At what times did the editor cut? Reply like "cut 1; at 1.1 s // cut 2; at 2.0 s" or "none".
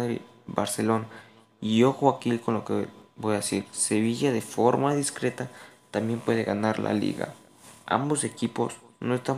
none